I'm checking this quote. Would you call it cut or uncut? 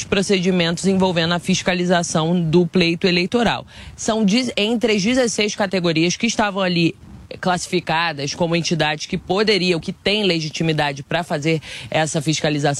uncut